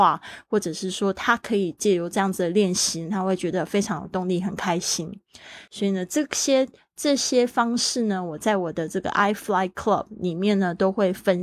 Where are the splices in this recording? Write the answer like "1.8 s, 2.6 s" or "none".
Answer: 5.7 s